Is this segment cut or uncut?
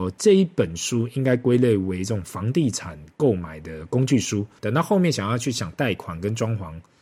cut